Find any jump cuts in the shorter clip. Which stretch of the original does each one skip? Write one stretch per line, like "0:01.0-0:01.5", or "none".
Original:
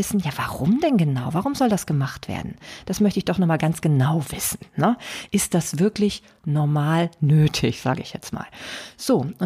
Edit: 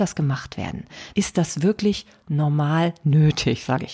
0:02.8-0:05.3

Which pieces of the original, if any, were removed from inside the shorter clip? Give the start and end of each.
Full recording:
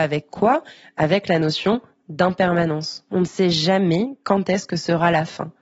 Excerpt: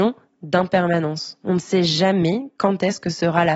none

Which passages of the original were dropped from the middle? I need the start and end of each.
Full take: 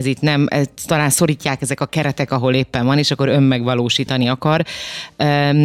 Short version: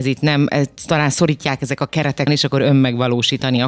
0:02.3-0:02.9

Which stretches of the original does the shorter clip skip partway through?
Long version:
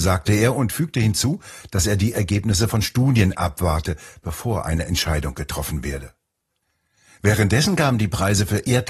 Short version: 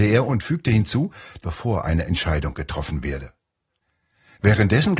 0:01.7-0:04.2

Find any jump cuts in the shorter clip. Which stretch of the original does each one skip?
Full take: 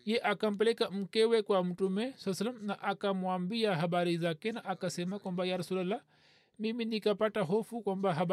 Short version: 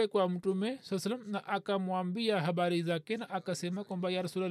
none

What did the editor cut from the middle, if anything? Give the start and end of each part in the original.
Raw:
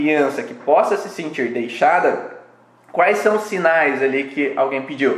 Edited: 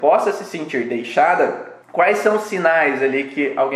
0:02.5-0:02.8

